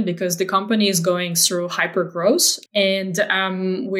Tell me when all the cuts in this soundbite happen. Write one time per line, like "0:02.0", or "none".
0:02.7